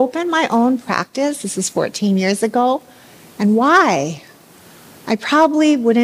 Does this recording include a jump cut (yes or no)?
no